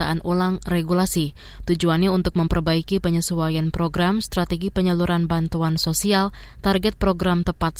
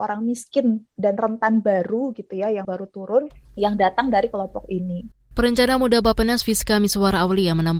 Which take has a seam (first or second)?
second